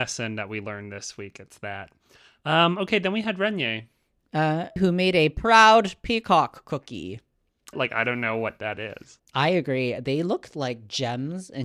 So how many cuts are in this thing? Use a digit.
3